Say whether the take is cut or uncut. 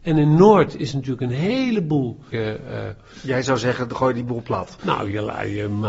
cut